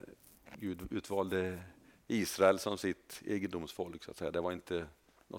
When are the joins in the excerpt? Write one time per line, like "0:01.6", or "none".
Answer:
none